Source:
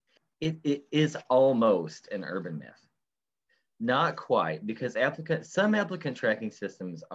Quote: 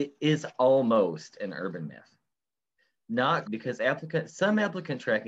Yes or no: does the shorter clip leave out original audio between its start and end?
yes